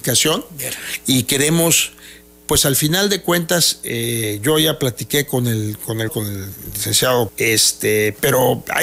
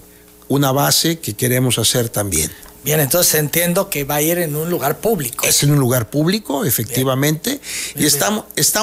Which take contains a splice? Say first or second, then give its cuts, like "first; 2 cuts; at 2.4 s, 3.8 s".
first; 2 cuts; at 6.1 s, 7.3 s